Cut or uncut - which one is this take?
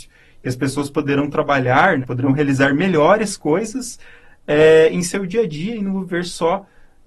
cut